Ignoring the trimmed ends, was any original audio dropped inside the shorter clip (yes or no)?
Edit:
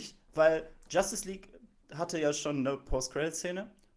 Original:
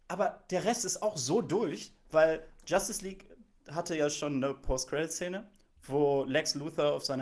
no